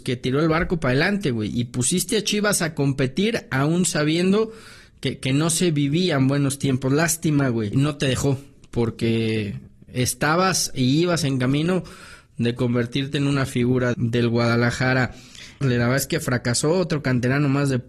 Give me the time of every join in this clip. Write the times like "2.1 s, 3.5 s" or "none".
7.7 s, 13.9 s, 15.6 s